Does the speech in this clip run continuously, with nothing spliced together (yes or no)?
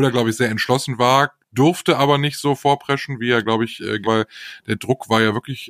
no